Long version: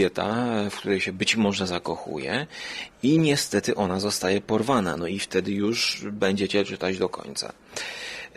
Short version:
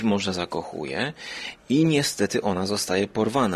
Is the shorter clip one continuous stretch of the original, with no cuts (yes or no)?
yes